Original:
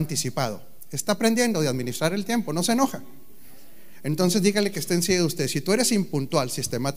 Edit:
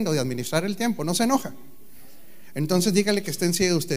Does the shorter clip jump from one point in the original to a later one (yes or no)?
no